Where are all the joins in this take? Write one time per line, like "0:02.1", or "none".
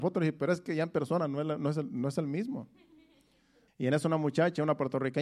0:03.7